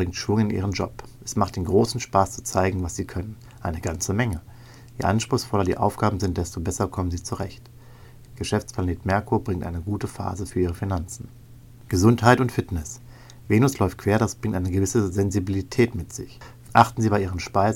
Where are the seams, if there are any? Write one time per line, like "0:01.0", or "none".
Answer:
0:08.3